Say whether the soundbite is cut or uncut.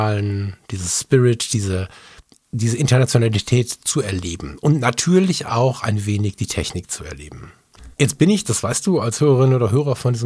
cut